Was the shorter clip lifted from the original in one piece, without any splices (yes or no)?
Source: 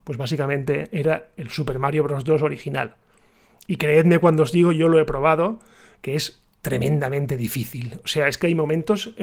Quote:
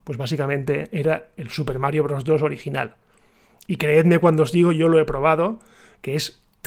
yes